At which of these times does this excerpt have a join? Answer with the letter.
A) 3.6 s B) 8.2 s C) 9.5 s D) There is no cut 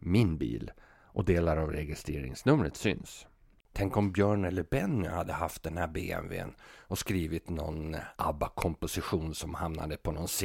A